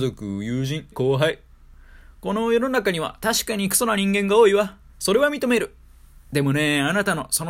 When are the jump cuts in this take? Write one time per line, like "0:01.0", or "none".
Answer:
0:00.9
0:04.9